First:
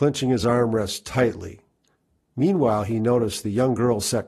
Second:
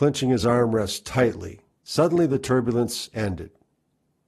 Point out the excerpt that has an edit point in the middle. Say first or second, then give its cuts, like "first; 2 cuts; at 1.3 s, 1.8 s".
second; 1 cut; at 1.7 s